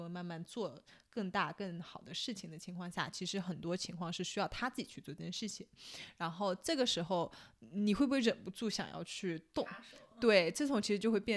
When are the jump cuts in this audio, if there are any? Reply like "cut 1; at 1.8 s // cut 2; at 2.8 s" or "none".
none

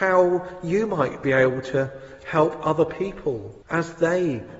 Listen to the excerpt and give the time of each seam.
cut 1; at 3.6 s

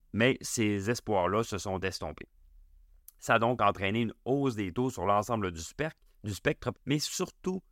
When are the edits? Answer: cut 1; at 6.7 s

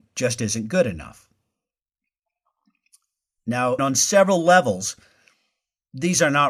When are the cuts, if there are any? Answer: cut 1; at 3.8 s

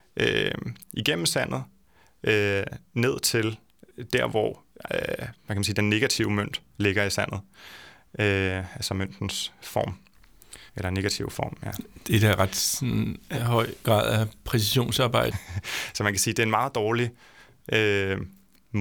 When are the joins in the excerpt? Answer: cut 1; at 10.7 s // cut 2; at 15.3 s

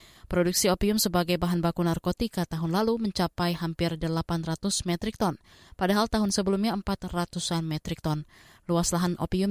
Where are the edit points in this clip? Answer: none

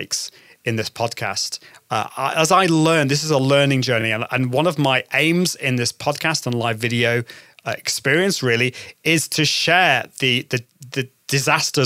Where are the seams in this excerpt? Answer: none

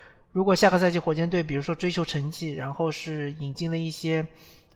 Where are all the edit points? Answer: none

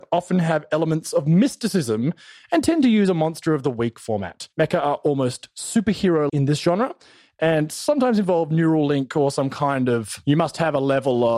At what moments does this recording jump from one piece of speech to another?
cut 1; at 6.3 s

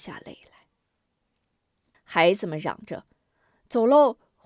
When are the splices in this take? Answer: cut 1; at 1.9 s

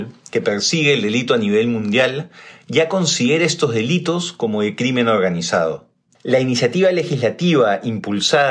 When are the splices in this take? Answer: cut 1; at 6.1 s

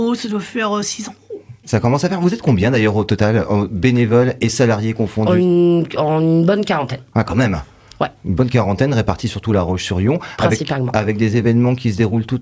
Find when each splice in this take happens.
none

